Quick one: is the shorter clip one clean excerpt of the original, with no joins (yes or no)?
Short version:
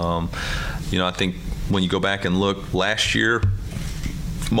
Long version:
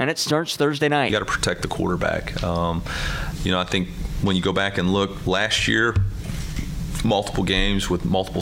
yes